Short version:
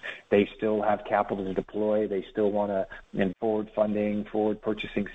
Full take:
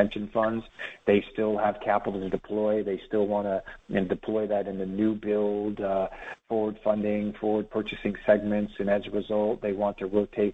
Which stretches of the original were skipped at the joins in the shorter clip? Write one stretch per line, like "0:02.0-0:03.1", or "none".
0:04.1-0:06.4